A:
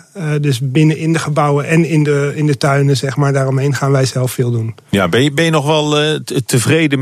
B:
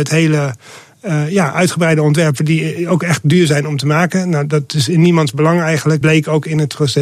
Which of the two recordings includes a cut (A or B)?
B